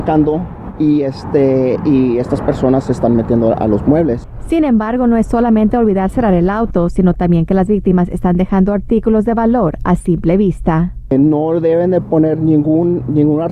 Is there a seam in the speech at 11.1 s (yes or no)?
no